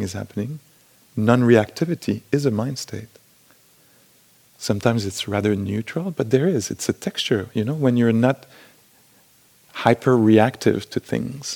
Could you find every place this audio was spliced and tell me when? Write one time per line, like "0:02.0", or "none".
0:04.5